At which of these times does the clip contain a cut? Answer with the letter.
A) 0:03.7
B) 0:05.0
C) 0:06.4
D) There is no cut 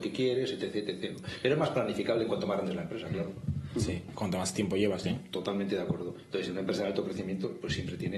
B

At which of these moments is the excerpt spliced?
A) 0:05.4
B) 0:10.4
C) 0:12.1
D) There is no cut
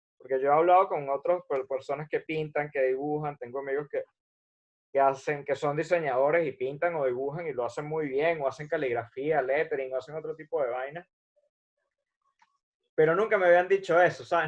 D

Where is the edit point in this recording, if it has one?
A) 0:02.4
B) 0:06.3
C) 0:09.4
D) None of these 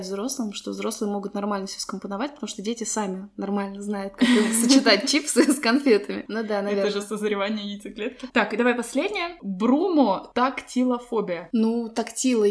B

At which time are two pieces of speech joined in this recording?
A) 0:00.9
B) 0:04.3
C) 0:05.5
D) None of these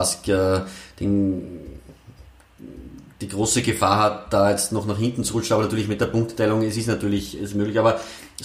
D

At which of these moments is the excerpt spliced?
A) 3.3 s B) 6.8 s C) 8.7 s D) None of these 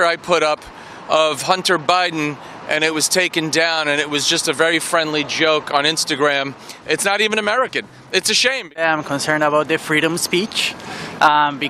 B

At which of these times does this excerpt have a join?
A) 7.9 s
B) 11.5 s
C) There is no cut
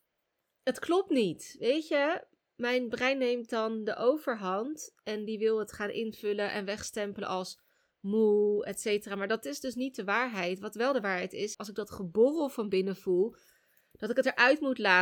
B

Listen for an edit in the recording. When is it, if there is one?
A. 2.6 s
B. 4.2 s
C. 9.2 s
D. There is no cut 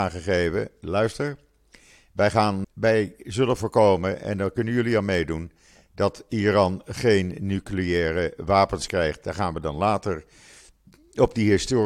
A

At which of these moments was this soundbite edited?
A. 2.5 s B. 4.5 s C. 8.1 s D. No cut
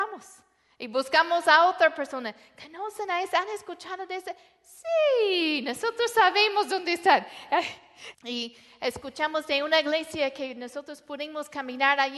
C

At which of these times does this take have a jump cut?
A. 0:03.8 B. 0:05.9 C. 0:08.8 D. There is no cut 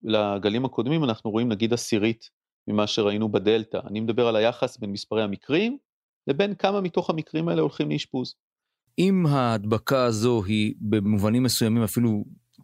C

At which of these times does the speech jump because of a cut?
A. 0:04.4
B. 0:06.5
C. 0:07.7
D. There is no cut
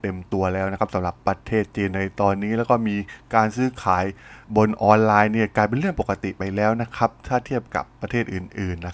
A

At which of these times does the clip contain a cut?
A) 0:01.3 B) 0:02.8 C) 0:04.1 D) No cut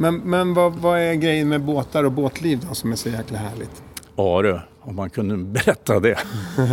D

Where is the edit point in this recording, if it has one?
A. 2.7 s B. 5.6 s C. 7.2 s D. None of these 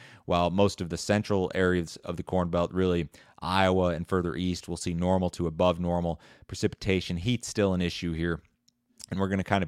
D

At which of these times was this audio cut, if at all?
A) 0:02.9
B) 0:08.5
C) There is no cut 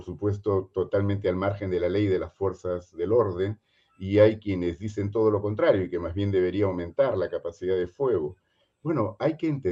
C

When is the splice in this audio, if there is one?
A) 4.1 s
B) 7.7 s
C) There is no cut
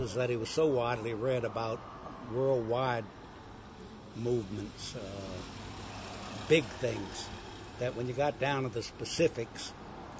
A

